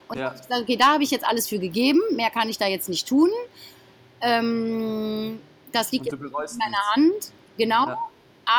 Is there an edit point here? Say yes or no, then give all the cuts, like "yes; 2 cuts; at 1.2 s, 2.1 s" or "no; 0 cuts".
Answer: no; 0 cuts